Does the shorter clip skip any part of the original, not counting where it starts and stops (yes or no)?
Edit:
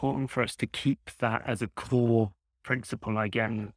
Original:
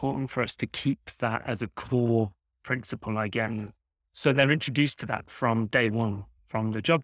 no